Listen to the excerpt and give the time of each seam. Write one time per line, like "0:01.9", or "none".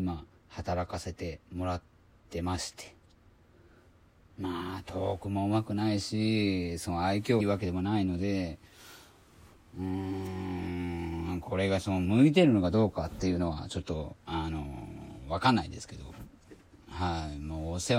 0:07.4

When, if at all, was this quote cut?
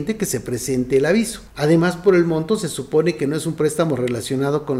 0:01.5

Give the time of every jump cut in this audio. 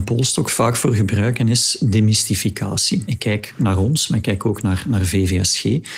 0:03.1

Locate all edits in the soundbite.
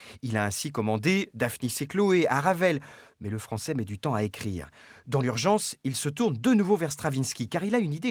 none

